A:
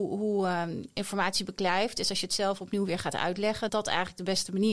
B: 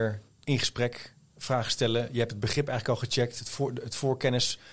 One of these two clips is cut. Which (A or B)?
A